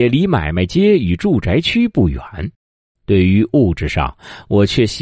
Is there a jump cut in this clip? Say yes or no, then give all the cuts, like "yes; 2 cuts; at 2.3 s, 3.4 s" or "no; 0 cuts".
yes; 1 cut; at 2.9 s